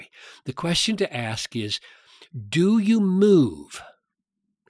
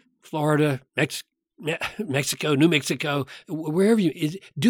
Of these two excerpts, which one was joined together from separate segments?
second; 1 cut; at 3.4 s

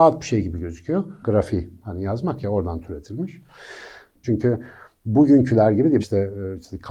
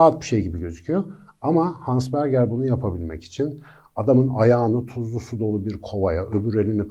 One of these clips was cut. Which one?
first; 3 cuts; at 1.2 s, 4.2 s, 6.0 s

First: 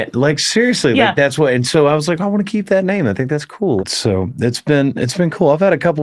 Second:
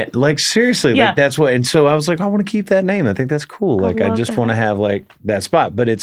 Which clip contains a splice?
first; 1 cut; at 3.8 s

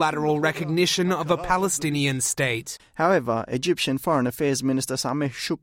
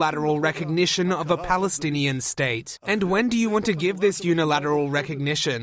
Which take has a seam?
first; 1 cut; at 2.8 s

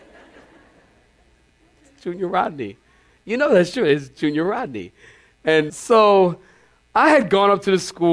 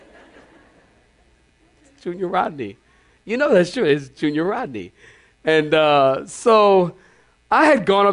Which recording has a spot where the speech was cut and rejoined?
first; 1 cut; at 5.7 s

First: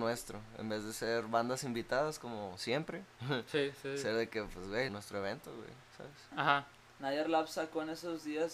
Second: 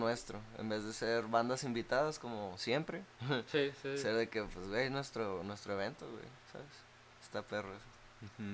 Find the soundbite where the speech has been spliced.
first; 2 cuts; at 4.9 s, 6.3 s

